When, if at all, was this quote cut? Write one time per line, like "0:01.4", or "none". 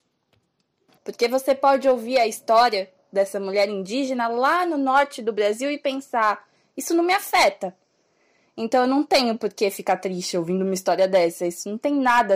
0:01.0